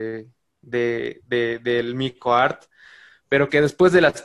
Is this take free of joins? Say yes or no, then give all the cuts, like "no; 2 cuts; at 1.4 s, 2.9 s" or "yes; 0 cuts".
yes; 0 cuts